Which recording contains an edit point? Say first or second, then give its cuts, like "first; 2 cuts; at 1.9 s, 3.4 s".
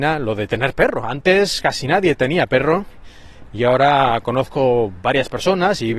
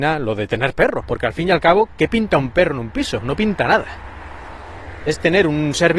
second; 1 cut; at 1.0 s